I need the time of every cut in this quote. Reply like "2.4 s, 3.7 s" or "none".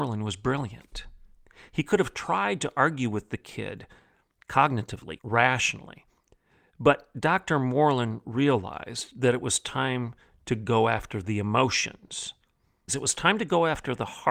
5.2 s, 12.9 s